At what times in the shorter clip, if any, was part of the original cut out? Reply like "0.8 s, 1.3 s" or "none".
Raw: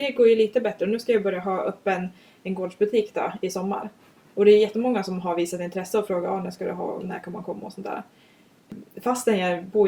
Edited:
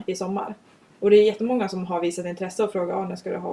none